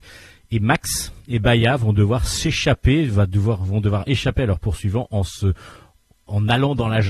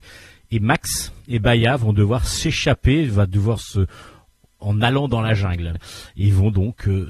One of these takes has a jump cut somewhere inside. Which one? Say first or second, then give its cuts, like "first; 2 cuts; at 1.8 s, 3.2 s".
second; 2 cuts; at 3.6 s, 5.8 s